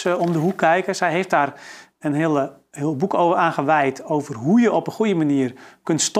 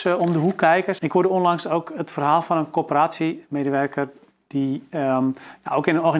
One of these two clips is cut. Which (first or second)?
second